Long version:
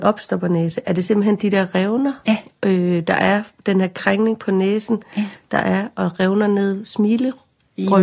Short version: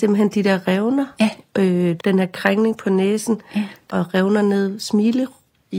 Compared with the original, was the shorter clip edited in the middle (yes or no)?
yes